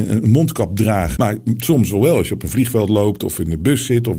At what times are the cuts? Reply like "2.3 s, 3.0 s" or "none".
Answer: 1.2 s